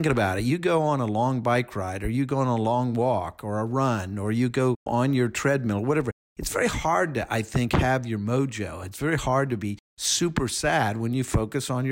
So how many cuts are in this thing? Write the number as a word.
one